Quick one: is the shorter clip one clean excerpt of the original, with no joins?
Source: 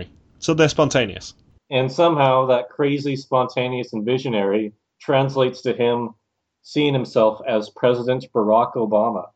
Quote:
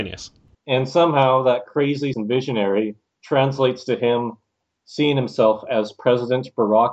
no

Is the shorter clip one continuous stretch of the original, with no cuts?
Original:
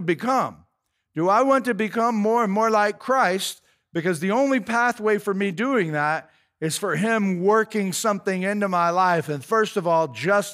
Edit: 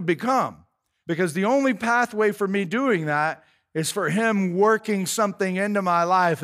no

